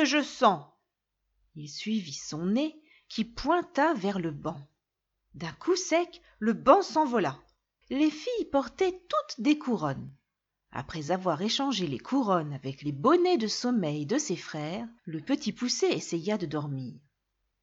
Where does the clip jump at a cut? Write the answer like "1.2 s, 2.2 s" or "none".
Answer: 7.8 s, 15.0 s